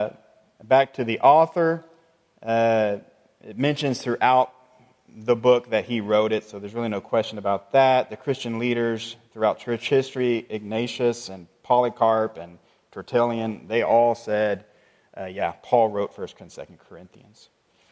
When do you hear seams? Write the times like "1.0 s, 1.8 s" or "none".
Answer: none